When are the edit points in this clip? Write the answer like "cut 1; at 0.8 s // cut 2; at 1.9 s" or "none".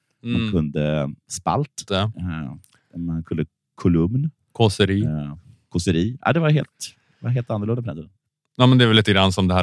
cut 1; at 1.9 s